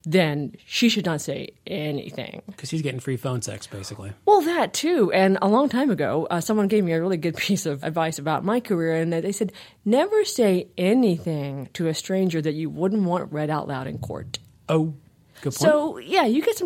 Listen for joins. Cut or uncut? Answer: cut